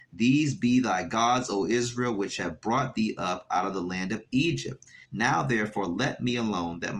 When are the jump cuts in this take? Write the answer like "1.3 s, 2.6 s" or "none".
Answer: 5.0 s